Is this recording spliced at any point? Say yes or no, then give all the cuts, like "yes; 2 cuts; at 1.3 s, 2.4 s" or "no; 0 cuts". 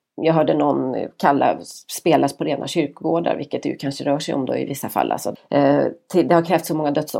yes; 1 cut; at 5.3 s